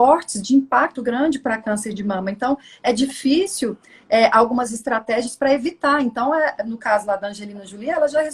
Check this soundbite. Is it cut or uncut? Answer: cut